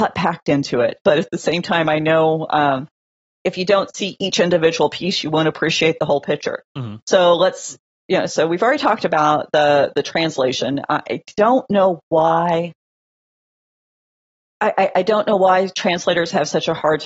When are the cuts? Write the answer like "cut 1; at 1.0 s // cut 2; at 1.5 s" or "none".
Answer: cut 1; at 1.0 s